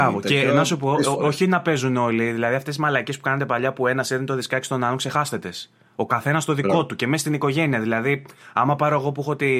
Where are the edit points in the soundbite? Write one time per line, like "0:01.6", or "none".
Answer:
none